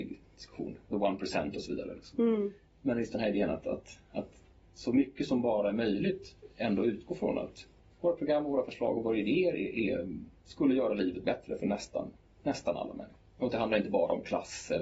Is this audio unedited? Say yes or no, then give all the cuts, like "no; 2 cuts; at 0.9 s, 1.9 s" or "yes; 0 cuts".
yes; 0 cuts